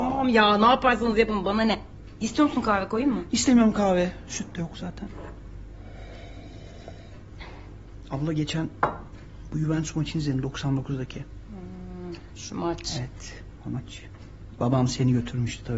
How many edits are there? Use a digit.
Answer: 0